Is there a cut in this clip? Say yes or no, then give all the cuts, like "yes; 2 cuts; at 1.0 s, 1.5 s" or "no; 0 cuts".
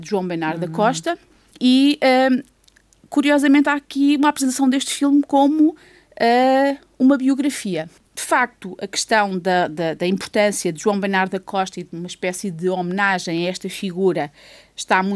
no; 0 cuts